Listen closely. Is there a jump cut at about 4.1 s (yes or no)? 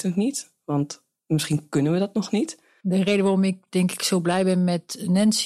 no